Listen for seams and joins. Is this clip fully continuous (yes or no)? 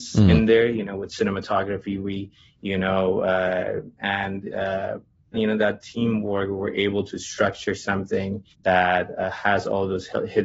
no